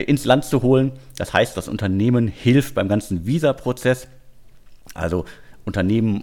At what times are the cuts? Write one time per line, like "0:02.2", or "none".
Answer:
none